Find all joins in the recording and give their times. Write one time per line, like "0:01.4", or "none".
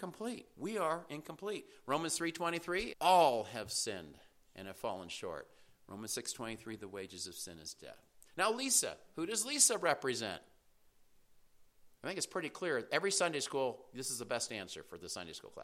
0:02.9